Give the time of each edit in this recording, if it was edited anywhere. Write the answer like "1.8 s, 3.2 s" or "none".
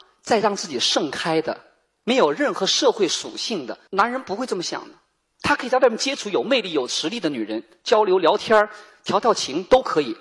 3.9 s